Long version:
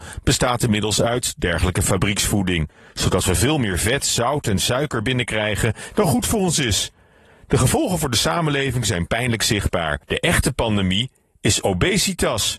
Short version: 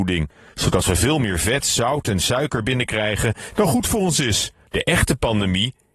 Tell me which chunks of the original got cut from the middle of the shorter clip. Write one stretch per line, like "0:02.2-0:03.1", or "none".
0:07.1-0:10.0